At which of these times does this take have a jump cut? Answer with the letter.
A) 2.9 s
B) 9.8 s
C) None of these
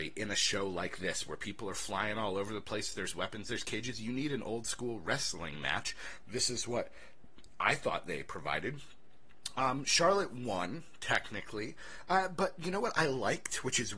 C